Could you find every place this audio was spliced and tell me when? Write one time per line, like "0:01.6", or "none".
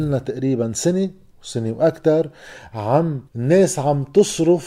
0:03.3